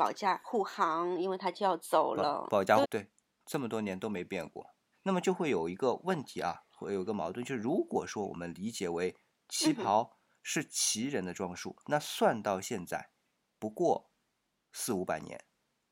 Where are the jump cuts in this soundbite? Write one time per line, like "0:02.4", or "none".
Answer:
0:02.8
0:04.9
0:11.8